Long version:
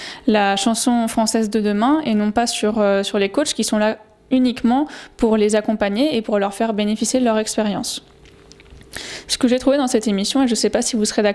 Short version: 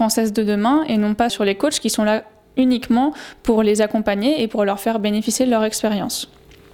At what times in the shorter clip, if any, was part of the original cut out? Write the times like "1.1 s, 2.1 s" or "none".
1.3 s